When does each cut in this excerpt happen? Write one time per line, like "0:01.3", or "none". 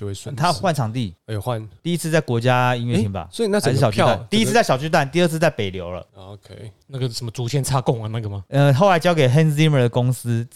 0:08.5